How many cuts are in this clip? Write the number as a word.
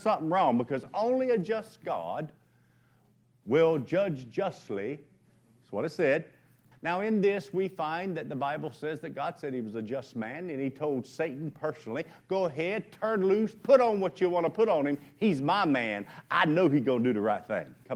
one